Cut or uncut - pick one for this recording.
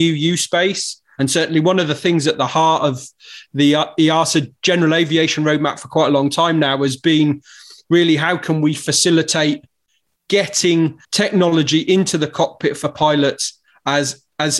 cut